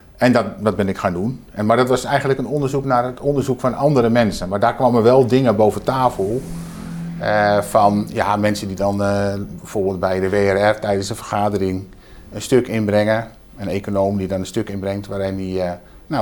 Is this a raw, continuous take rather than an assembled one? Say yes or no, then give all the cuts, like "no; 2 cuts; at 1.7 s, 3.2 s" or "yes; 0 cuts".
yes; 0 cuts